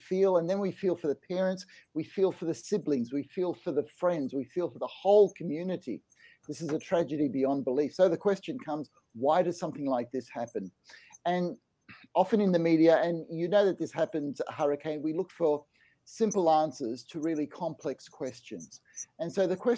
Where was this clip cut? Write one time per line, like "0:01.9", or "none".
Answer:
none